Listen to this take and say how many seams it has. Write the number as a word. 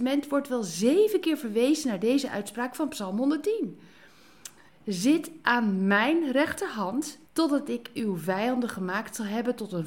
two